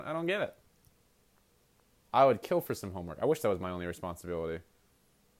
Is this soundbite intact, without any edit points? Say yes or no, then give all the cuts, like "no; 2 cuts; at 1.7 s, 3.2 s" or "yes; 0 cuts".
no; 1 cut; at 2.0 s